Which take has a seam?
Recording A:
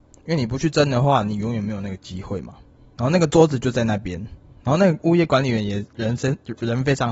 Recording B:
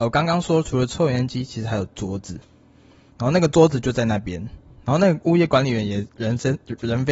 A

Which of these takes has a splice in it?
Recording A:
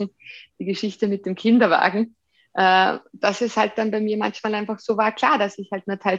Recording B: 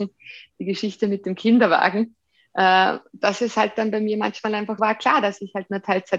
B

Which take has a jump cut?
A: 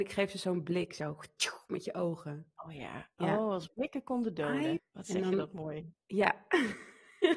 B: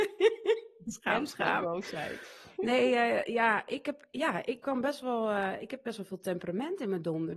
A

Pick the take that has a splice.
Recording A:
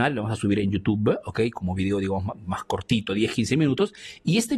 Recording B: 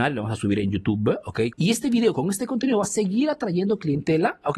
B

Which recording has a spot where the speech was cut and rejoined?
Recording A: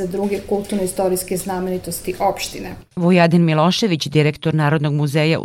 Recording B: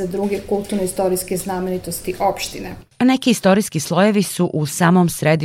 A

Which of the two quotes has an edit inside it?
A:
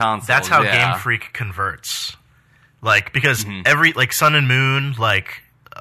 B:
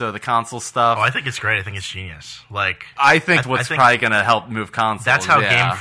B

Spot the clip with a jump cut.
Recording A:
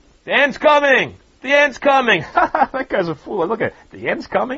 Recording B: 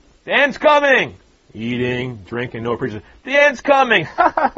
A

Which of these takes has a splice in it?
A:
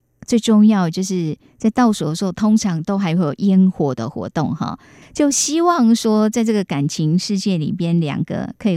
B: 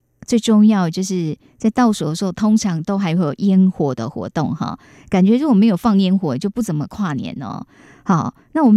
A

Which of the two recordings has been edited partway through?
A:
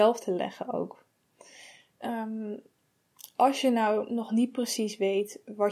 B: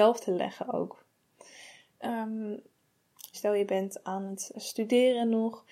B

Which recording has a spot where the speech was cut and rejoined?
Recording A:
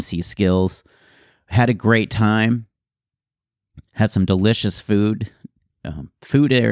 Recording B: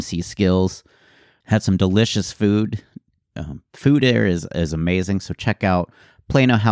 B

